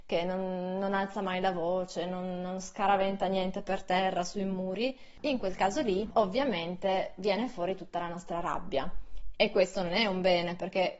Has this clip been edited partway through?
yes; 2 cuts; at 5.2 s, 9.3 s

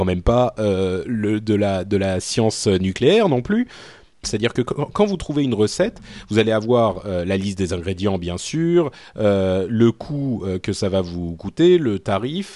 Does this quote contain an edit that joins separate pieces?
yes; 1 cut; at 4.2 s

